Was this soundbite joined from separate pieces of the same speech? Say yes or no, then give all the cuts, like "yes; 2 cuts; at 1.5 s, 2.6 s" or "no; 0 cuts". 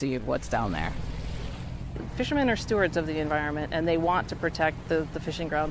no; 0 cuts